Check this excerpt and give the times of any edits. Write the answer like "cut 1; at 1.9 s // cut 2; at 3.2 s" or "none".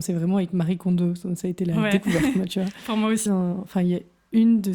cut 1; at 3.3 s